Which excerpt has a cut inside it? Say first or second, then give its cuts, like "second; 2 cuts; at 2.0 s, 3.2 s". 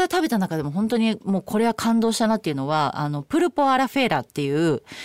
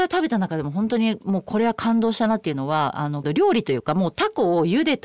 second; 1 cut; at 3.2 s